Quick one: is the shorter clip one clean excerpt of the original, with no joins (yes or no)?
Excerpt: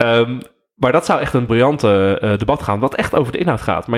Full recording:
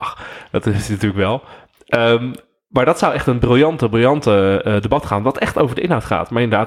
no